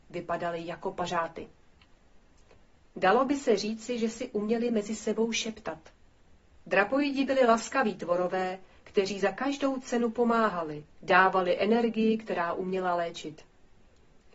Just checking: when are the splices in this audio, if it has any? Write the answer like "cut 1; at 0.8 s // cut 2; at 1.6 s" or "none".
cut 1; at 6.6 s // cut 2; at 10.9 s